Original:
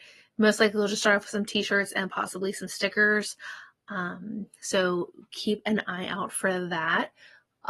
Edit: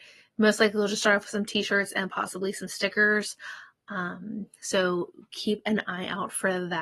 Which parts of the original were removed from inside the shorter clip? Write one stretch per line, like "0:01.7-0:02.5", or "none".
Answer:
none